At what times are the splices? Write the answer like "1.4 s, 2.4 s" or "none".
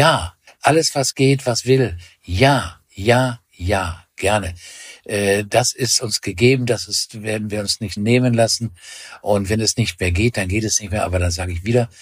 8.0 s